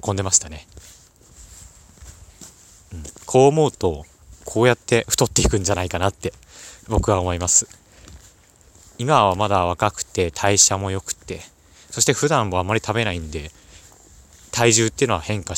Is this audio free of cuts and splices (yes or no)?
yes